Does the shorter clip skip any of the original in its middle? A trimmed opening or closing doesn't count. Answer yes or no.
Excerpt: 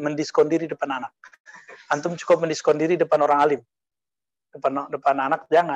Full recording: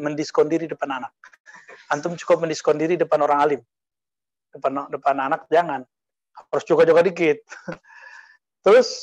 no